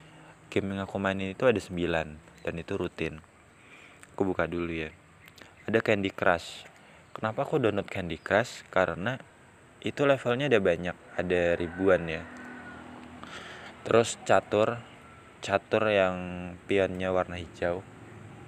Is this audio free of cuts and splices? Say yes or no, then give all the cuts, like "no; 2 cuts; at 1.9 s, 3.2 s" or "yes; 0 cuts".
yes; 0 cuts